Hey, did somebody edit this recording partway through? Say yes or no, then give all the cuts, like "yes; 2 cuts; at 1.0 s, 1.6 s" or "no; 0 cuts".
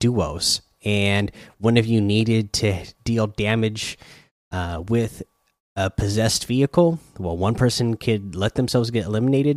no; 0 cuts